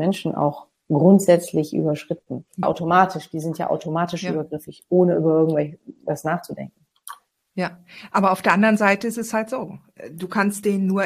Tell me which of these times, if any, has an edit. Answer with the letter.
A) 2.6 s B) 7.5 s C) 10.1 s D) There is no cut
A